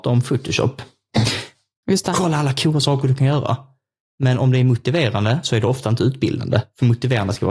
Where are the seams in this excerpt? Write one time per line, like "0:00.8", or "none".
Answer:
0:01.8